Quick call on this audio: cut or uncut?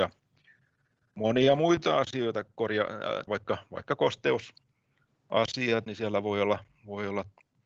cut